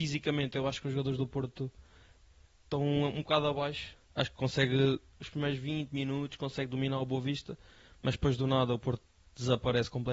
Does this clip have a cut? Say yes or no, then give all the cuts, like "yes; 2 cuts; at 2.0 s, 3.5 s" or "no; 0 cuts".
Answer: yes; 1 cut; at 3.9 s